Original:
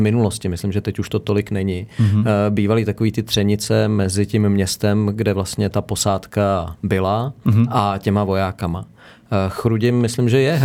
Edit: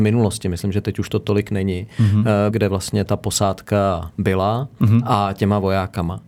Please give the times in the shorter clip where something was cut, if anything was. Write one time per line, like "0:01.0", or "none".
0:02.5